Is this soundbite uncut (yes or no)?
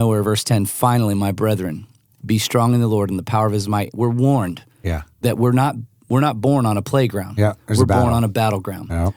yes